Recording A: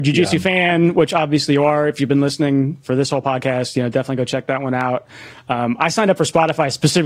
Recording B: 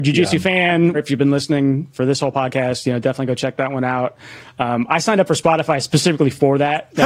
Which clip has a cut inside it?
B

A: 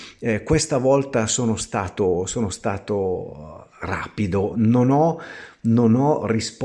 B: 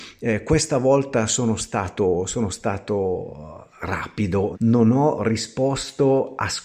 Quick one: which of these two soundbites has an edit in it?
B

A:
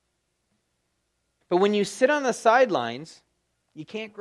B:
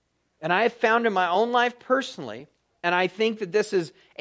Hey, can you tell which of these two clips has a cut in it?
A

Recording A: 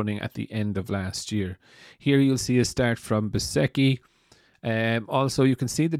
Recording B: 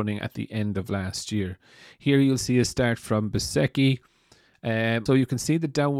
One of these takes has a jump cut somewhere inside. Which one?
B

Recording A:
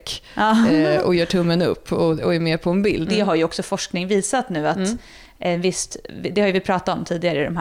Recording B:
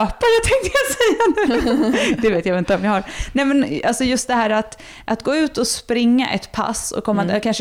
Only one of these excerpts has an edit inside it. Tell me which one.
A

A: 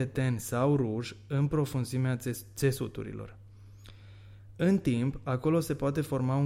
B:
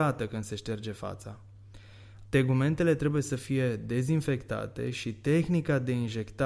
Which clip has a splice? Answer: B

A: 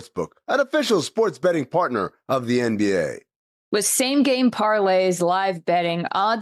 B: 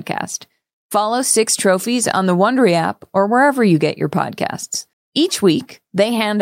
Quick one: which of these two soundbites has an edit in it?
B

